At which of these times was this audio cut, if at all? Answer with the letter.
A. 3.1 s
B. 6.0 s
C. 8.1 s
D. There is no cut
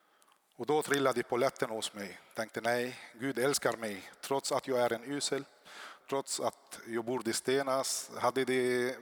B